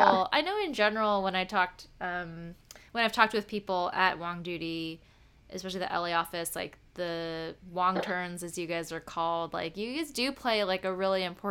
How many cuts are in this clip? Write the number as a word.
zero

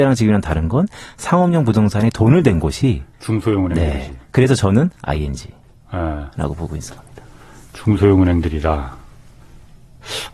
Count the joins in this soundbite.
one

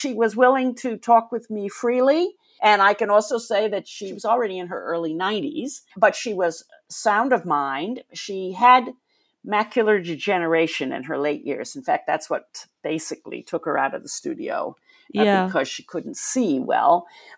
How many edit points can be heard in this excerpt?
two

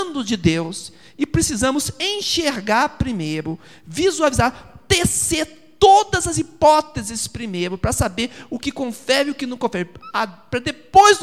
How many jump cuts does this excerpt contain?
zero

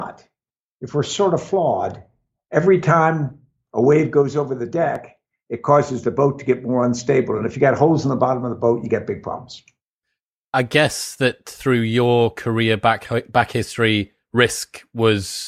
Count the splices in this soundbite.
zero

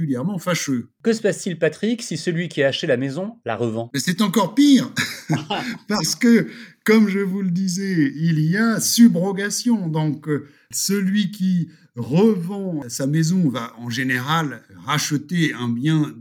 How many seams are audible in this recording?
zero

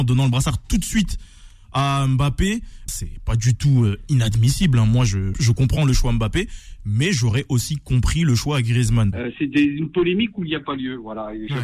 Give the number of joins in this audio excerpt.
three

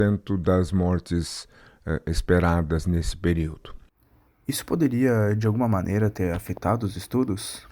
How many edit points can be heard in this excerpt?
one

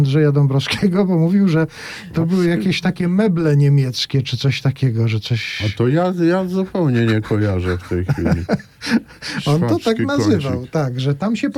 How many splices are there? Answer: zero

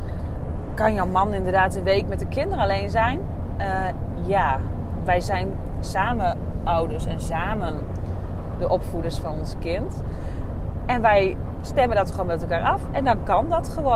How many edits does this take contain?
zero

